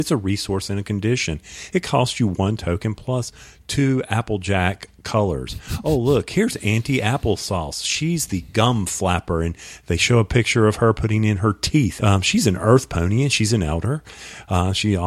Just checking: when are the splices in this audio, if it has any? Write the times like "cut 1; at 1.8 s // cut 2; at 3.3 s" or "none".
cut 1; at 12.0 s